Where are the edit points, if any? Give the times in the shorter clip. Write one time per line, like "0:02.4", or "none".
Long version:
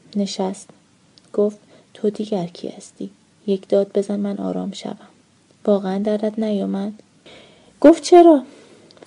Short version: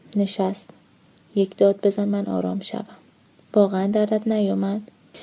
0:01.2